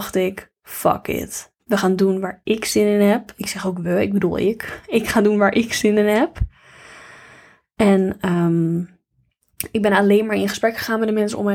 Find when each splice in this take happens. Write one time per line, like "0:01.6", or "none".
0:01.6